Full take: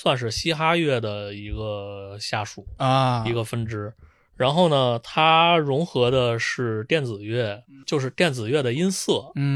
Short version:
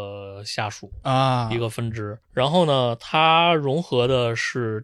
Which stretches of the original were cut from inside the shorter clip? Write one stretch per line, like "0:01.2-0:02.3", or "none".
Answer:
0:04.0-0:04.3